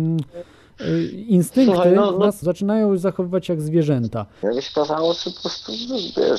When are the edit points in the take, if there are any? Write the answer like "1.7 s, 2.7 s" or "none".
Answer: 2.4 s, 4.4 s